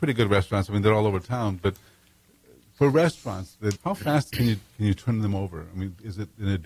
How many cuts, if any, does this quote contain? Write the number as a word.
one